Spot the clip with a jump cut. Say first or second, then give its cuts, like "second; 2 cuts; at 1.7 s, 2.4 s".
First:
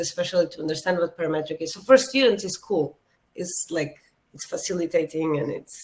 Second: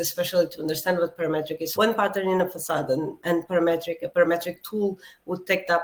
second; 1 cut; at 1.8 s